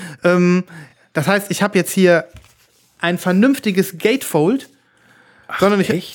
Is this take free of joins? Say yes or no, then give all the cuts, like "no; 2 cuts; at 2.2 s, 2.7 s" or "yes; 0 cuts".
yes; 0 cuts